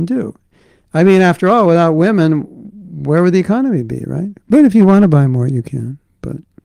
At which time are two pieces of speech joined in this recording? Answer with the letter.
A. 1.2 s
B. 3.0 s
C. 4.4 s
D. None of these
C